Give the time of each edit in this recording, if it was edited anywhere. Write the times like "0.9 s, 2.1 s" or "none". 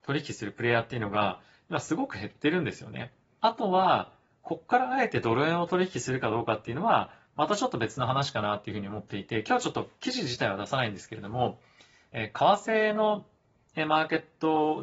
3.4 s